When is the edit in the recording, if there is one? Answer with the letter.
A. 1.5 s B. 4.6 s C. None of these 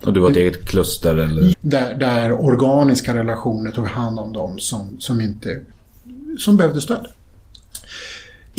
A